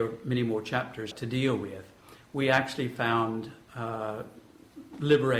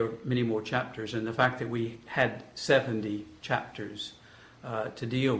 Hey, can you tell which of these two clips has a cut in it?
first; 1 cut; at 1.1 s

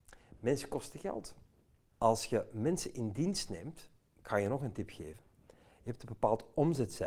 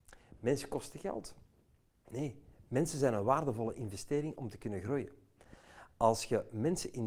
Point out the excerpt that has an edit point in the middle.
first; 1 cut; at 1.9 s

